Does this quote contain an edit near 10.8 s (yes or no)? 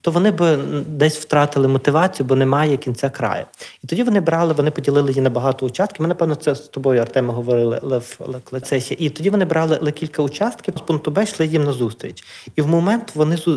yes